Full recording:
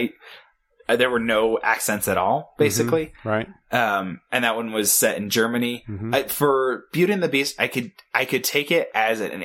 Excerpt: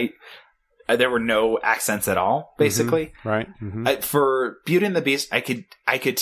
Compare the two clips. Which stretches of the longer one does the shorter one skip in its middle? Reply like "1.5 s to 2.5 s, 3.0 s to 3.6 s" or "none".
3.5 s to 5.8 s